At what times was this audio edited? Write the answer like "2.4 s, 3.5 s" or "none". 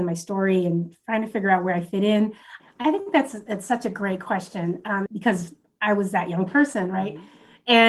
2.6 s, 5.1 s